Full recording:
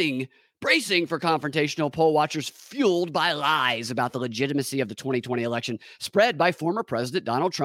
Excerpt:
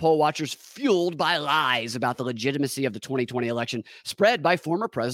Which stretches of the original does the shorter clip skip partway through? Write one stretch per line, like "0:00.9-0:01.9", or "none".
none